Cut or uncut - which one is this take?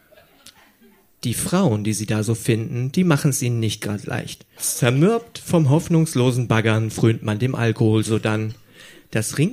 cut